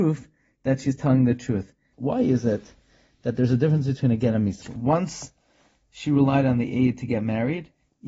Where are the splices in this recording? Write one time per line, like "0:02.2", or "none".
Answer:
0:01.9
0:04.6